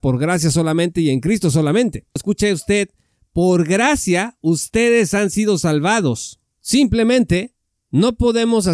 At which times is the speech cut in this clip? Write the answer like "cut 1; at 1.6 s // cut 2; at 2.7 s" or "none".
cut 1; at 2.2 s